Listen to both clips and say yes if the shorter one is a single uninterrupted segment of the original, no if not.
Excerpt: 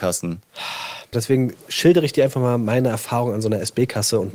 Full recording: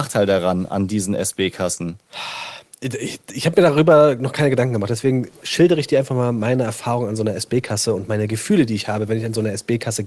no